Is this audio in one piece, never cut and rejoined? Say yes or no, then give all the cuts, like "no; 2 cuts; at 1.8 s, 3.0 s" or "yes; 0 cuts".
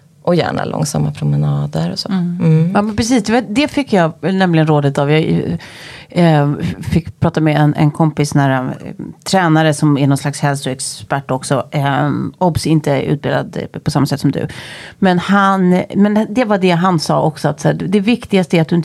yes; 0 cuts